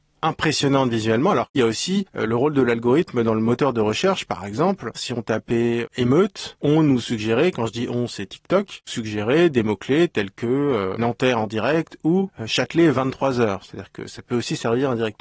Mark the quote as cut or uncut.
uncut